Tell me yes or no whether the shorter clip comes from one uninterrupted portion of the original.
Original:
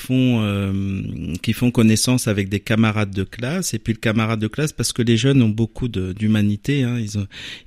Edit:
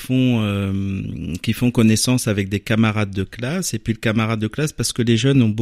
yes